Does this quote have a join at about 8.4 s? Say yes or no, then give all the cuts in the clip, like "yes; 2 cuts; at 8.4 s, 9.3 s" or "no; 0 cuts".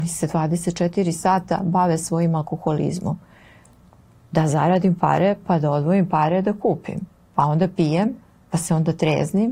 no; 0 cuts